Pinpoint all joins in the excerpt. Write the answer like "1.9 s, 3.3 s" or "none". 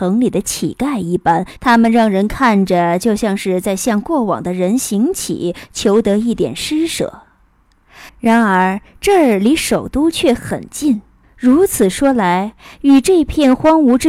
1.6 s, 8.1 s, 11.2 s